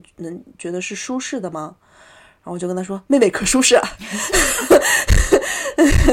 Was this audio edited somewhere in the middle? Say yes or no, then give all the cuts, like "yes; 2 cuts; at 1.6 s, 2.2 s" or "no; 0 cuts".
no; 0 cuts